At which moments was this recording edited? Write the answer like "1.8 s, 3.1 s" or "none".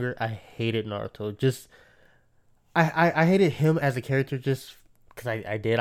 none